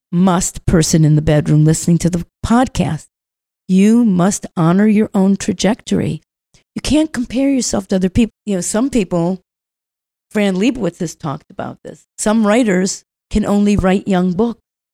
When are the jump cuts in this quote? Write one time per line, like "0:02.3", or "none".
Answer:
0:08.3
0:12.1